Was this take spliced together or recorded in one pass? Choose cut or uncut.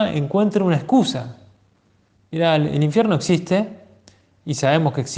uncut